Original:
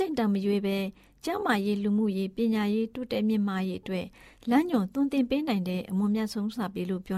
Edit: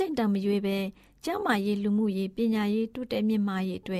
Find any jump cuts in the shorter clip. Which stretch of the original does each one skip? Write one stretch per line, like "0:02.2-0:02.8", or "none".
none